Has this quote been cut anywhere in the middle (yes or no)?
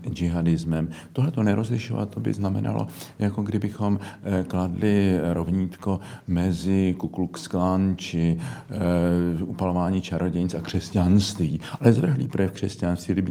yes